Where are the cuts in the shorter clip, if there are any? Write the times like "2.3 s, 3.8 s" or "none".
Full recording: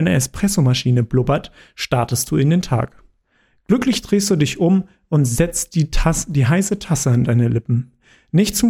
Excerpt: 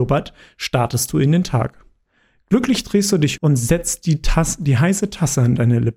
3.4 s